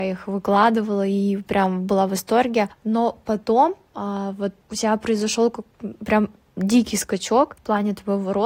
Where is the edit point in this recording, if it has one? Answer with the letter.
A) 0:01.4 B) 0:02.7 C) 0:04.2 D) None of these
D